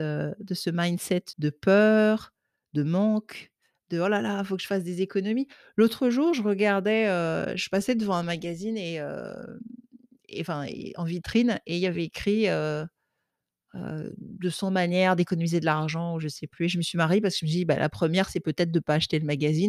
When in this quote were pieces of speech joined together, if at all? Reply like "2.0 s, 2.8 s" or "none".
1.3 s